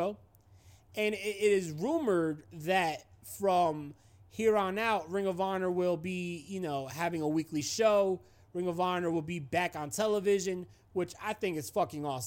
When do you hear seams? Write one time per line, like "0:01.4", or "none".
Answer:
none